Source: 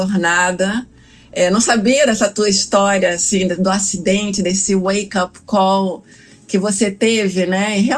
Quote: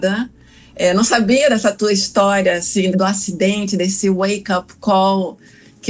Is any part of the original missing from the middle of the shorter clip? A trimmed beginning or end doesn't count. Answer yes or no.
yes